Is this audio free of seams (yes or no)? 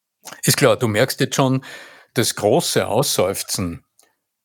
yes